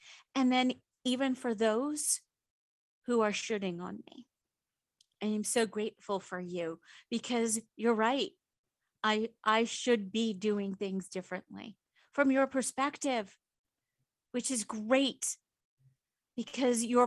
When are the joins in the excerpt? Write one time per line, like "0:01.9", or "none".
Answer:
0:05.2